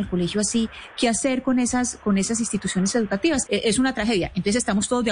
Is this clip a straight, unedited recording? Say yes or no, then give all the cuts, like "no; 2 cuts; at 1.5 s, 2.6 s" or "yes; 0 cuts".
no; 1 cut; at 3.5 s